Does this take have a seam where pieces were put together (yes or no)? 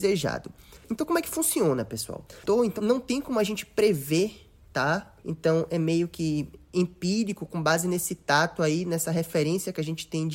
yes